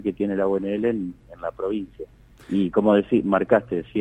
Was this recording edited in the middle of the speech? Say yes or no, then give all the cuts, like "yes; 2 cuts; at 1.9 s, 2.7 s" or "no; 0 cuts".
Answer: no; 0 cuts